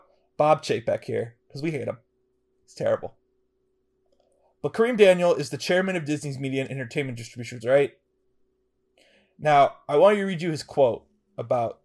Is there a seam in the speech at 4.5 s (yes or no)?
no